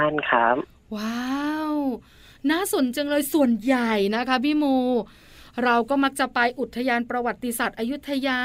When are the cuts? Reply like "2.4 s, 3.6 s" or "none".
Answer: 2.9 s